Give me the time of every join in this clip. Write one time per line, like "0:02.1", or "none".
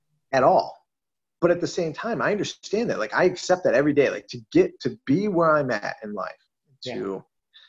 none